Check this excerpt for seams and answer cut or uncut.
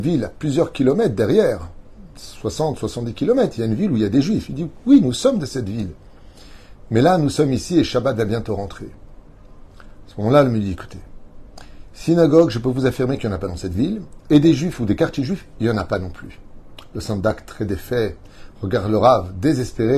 uncut